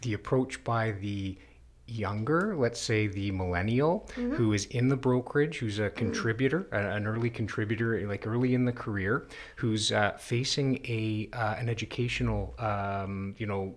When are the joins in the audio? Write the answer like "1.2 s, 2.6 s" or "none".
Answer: none